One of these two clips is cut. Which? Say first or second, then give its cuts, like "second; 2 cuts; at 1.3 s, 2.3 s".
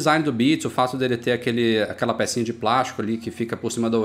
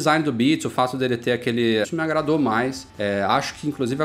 second; 1 cut; at 1.8 s